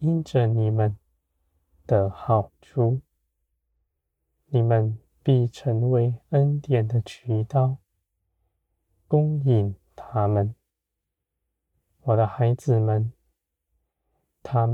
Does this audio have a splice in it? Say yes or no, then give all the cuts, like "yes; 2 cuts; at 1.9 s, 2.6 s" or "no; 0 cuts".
no; 0 cuts